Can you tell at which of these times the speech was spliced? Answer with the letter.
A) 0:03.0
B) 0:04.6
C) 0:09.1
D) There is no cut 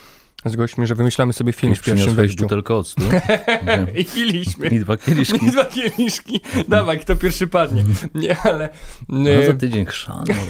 D